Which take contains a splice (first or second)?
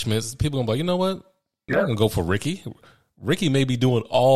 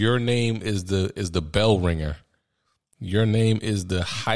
first